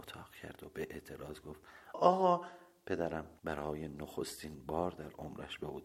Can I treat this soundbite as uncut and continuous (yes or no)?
no